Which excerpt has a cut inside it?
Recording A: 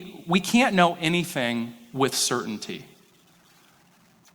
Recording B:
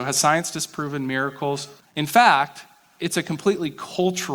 B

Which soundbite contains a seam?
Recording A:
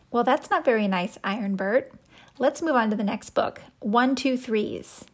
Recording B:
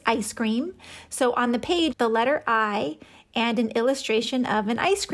B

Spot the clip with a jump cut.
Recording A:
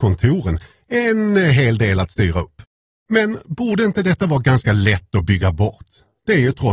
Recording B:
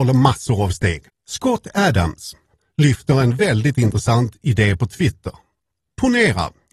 B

